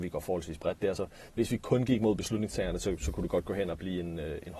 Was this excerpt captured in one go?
yes; 0 cuts

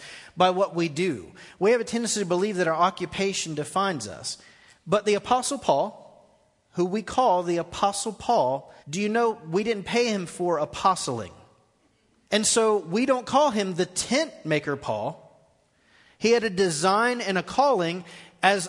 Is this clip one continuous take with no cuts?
no; 2 cuts; at 8.8 s, 12.3 s

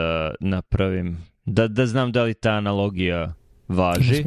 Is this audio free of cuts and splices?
yes; 0 cuts

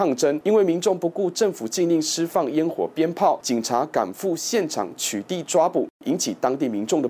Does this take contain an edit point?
no; 0 cuts

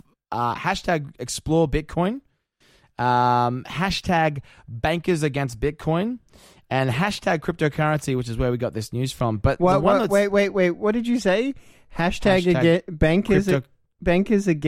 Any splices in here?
no; 0 cuts

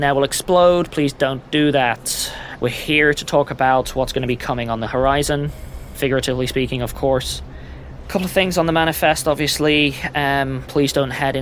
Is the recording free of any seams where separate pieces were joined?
no; 2 cuts; at 2.6 s, 8.0 s

